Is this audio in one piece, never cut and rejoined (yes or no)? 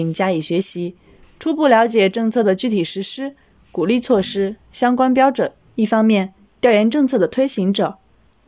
no